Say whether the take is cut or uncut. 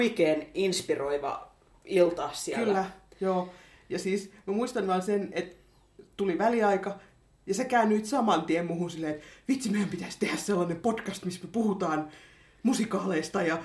uncut